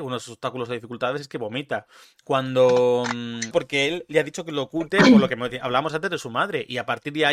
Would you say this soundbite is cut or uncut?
cut